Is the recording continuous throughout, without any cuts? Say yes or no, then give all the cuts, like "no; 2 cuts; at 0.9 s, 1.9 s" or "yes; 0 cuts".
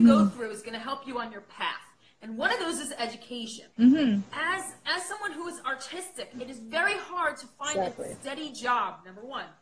no; 1 cut; at 3.7 s